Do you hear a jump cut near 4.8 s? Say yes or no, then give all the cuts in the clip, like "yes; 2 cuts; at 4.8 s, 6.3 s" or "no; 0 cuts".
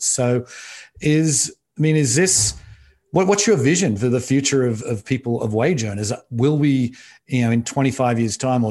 yes; 1 cut; at 4.8 s